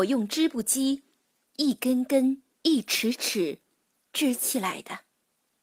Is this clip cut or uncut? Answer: cut